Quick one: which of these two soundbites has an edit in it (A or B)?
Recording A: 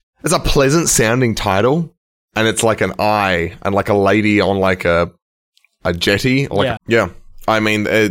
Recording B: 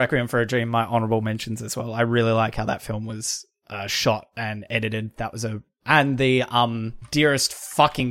A